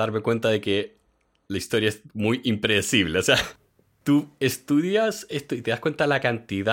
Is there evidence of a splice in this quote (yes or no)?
no